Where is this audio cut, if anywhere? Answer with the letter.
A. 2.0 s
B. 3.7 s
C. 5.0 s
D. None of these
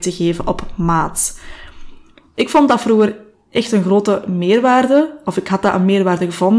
D